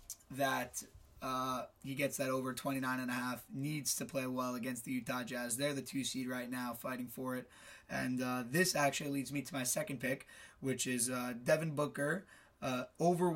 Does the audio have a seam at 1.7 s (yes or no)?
yes